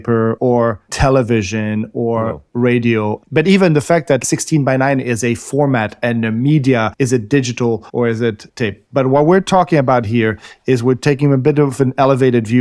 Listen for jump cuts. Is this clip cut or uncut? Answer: uncut